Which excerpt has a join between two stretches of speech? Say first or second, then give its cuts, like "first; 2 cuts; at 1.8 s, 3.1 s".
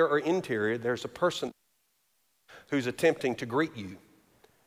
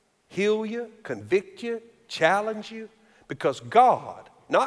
second; 1 cut; at 1.0 s